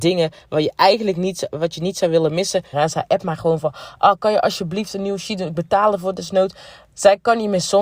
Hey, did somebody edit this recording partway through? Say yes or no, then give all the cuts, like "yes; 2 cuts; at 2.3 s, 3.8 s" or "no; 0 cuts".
yes; 1 cut; at 2.7 s